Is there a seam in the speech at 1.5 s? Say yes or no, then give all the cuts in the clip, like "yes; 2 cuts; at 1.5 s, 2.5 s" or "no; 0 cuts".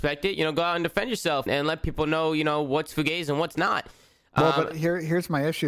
yes; 1 cut; at 1.5 s